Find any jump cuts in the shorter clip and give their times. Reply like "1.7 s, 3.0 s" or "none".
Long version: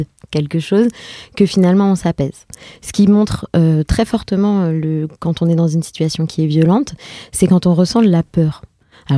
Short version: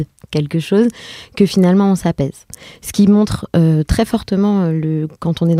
none